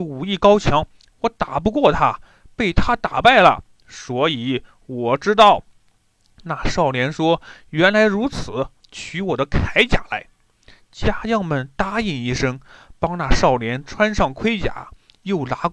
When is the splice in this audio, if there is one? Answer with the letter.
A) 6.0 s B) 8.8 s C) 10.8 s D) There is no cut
B